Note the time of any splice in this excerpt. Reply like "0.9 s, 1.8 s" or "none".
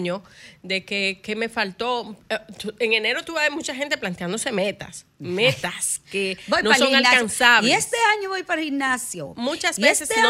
none